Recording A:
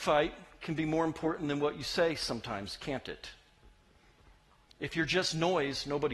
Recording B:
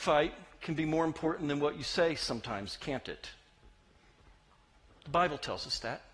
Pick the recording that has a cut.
A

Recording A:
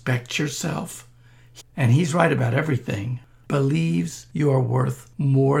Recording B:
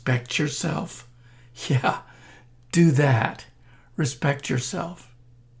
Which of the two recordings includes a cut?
A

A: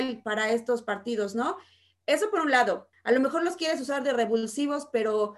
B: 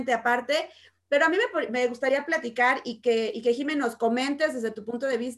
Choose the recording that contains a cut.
A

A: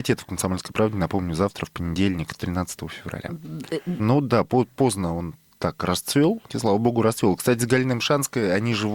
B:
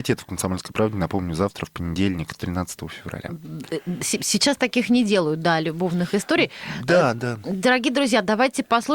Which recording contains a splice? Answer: A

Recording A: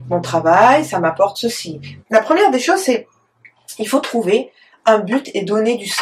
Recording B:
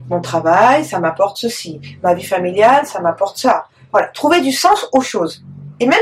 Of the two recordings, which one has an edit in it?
A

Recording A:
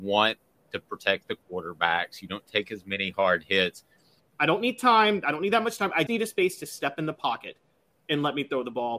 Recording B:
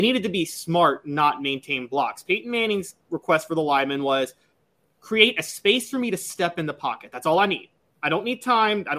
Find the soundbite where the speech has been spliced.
A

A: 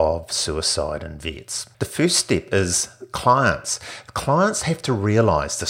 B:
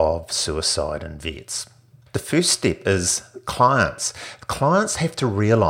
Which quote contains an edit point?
A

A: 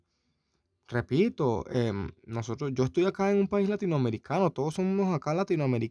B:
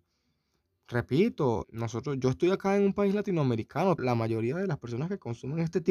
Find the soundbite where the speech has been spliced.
B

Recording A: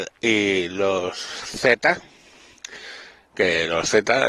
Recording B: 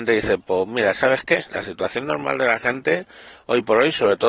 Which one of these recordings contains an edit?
B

